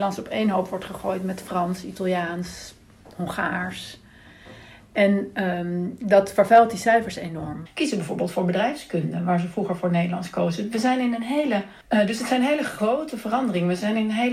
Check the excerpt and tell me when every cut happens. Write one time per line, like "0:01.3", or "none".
0:07.7